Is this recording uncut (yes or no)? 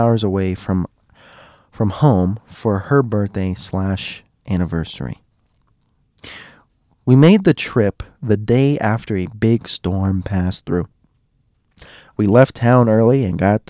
yes